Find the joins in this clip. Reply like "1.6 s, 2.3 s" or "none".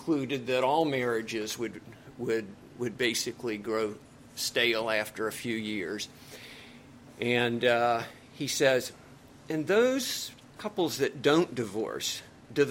none